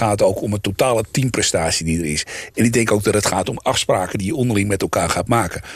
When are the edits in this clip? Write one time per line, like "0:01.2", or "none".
none